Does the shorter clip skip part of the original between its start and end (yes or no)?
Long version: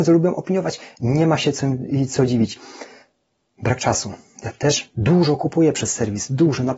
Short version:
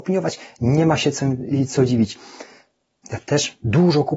yes